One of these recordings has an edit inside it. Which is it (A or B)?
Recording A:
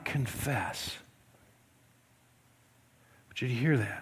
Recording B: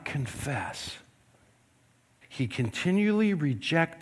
B